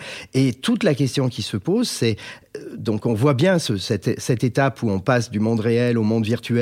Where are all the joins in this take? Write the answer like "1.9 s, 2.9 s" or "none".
none

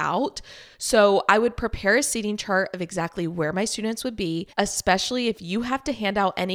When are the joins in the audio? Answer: 4.5 s

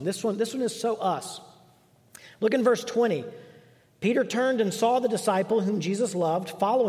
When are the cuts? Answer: none

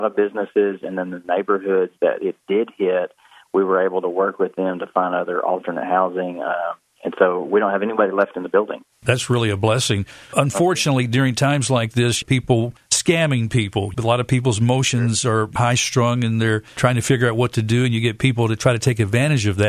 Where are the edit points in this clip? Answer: none

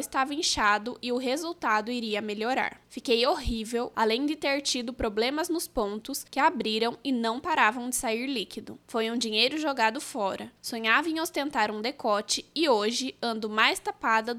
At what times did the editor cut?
3.9 s

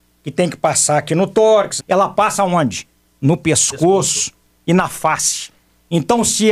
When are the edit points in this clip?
1.8 s

